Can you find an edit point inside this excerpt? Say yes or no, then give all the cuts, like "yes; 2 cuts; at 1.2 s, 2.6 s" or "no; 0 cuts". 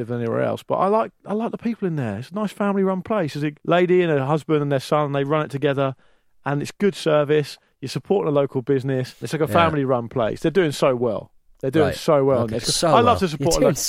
yes; 2 cuts; at 3.6 s, 9.2 s